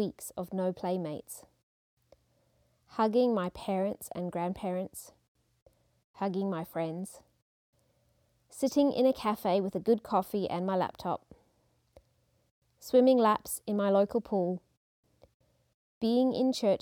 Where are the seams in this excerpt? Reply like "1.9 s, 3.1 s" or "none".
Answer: none